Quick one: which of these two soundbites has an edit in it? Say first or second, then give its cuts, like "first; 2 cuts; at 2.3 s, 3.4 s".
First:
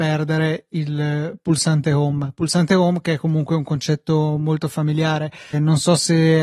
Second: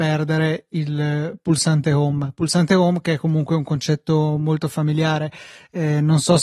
first; 1 cut; at 5.5 s